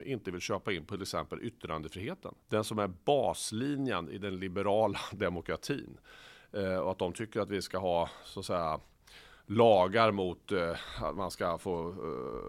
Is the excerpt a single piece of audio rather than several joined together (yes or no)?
no